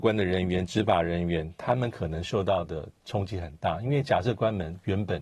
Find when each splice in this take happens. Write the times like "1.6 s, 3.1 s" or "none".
none